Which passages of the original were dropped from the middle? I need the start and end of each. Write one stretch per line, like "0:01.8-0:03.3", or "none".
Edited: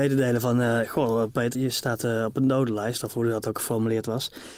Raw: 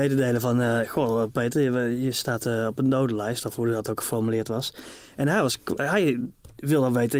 0:01.6-0:02.0